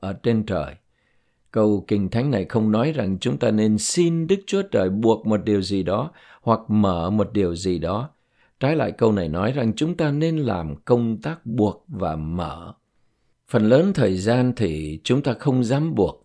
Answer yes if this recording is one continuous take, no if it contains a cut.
yes